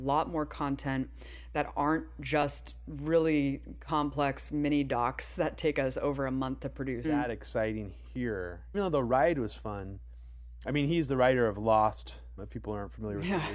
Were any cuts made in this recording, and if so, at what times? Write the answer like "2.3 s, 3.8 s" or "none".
7.0 s, 8.7 s, 12.4 s